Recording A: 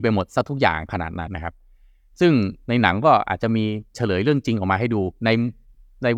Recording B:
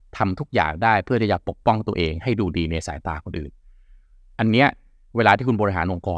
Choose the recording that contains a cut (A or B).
A